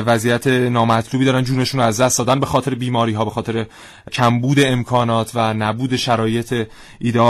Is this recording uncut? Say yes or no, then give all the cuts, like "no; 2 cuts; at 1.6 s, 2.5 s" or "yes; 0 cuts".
no; 1 cut; at 4.1 s